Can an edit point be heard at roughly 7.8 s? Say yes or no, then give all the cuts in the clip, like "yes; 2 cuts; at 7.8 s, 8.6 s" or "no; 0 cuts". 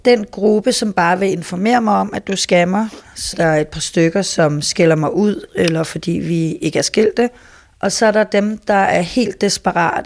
no; 2 cuts; at 3.3 s, 5.5 s